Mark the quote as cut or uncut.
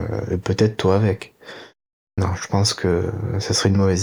uncut